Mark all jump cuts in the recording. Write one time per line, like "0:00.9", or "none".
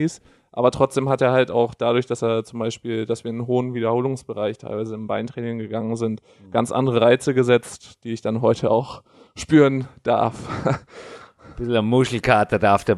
none